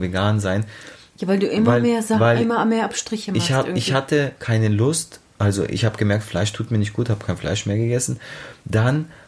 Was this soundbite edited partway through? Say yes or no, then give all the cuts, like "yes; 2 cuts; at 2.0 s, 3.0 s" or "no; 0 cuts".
no; 0 cuts